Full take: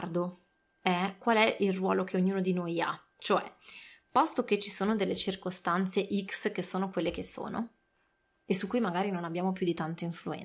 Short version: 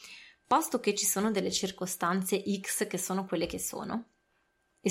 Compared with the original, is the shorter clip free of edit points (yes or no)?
yes